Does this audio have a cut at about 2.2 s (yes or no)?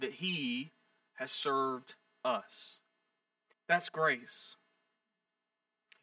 no